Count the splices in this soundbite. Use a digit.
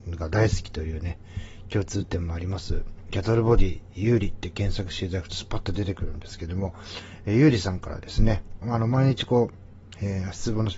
2